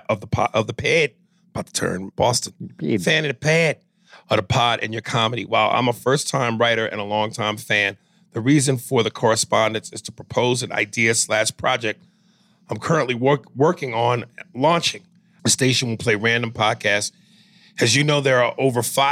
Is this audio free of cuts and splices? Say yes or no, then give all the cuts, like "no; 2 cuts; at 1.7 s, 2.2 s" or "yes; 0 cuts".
no; 2 cuts; at 2.1 s, 15.4 s